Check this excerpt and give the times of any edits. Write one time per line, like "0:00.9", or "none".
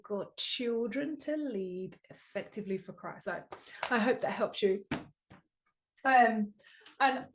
none